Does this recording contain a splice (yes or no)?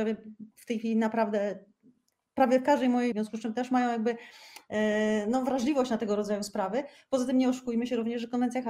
yes